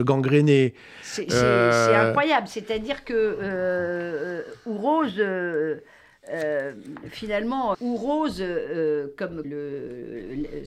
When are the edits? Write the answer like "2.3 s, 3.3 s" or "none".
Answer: 7.7 s, 9.4 s